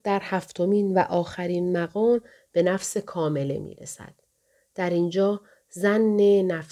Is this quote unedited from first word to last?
yes; 0 cuts

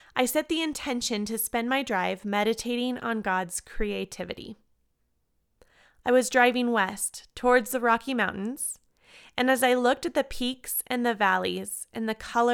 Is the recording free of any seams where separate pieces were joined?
yes; 0 cuts

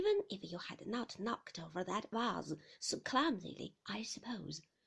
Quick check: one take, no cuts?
no; 1 cut; at 3.8 s

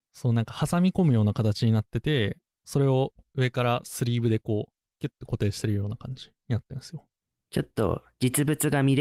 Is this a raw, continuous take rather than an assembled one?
yes; 0 cuts

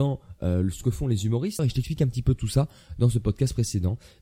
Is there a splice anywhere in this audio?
yes; 1 cut; at 1.6 s

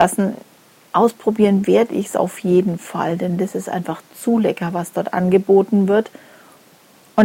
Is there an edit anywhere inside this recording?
no; 0 cuts

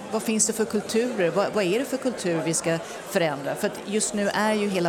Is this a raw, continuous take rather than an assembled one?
yes; 0 cuts

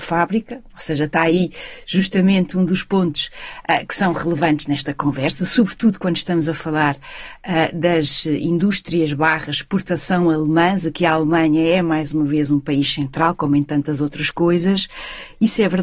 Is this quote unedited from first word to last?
yes; 0 cuts

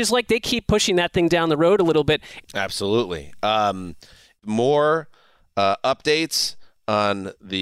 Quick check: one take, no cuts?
no; 1 cut; at 2.4 s

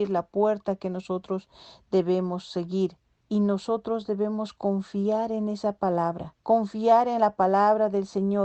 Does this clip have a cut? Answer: yes; 2 cuts; at 3.2 s, 6.4 s

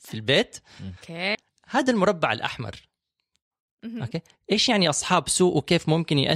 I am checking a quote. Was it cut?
yes; 2 cuts; at 1.3 s, 4.3 s

